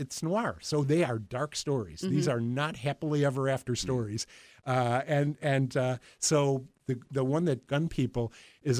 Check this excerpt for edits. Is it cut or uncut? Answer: cut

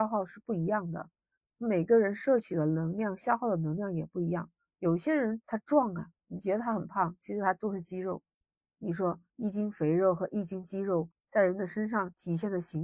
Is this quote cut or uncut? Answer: cut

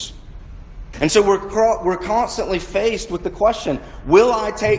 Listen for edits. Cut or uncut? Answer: cut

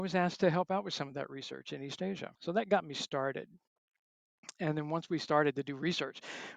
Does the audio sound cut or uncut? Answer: cut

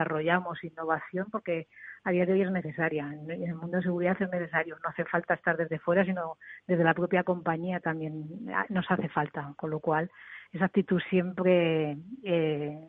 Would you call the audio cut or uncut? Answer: uncut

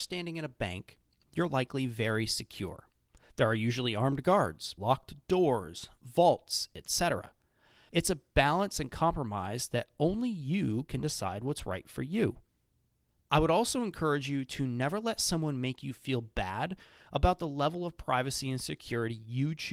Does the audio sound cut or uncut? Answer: cut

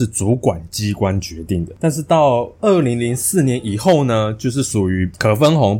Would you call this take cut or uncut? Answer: uncut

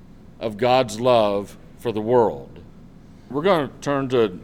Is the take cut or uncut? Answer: cut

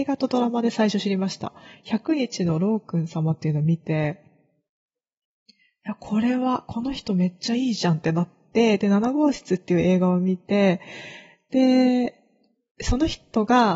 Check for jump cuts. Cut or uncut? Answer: uncut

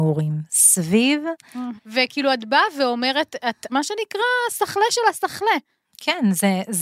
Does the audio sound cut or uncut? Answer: cut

